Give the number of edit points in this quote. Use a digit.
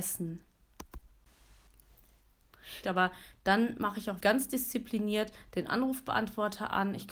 2